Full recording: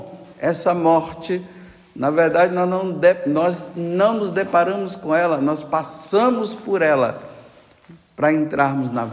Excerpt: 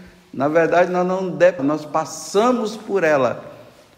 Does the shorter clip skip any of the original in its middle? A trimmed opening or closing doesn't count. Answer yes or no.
yes